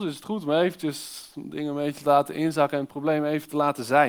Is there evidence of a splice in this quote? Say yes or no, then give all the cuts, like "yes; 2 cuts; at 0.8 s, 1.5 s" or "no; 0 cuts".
no; 0 cuts